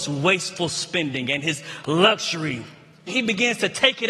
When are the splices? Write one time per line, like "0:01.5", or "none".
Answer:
0:03.1